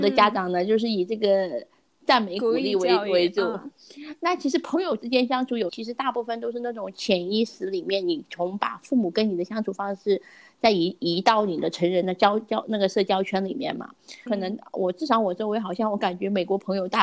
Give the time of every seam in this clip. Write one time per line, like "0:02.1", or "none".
0:05.7
0:14.3